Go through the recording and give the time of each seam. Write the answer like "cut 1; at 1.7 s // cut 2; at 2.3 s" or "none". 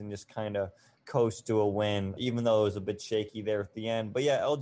cut 1; at 2.2 s